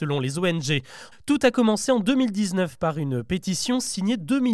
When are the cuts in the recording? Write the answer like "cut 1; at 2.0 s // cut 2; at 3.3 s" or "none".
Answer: cut 1; at 1.1 s